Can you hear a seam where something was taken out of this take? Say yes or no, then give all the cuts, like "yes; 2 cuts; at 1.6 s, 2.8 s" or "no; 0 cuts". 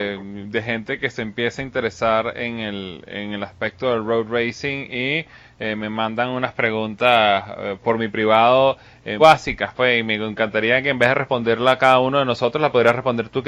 yes; 1 cut; at 9.2 s